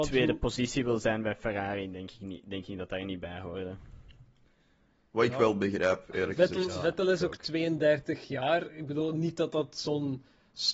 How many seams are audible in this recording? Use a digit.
0